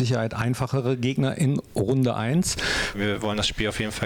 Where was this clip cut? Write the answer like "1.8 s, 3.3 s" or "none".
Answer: 2.9 s